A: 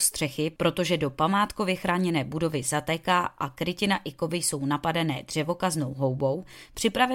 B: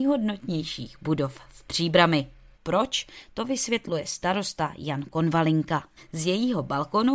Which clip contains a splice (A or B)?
B